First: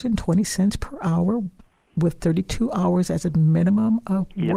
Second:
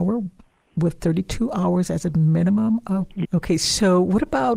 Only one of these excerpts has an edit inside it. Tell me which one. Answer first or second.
second